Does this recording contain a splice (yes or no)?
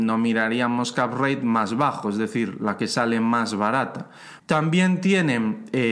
yes